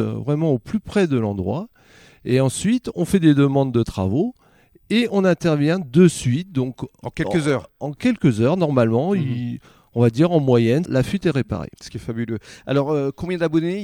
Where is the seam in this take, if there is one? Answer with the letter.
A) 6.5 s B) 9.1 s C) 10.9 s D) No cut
C